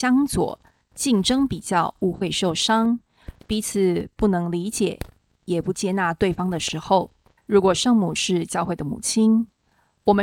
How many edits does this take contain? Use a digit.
1